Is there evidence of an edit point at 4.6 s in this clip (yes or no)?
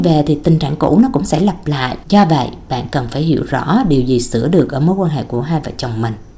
no